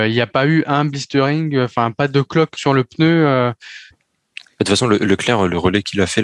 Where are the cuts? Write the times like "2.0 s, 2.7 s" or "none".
2.6 s, 3.9 s